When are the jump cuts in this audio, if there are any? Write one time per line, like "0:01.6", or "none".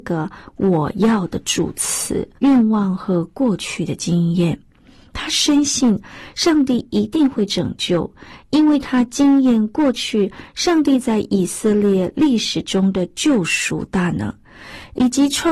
0:02.4